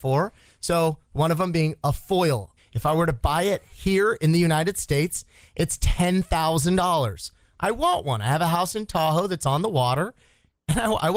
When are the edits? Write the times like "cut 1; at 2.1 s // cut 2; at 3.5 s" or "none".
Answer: cut 1; at 2.6 s